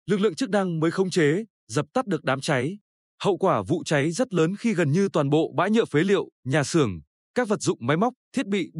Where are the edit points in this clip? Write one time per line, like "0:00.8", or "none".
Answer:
none